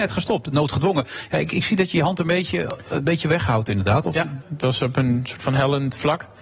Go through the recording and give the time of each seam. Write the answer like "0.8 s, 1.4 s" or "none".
4.4 s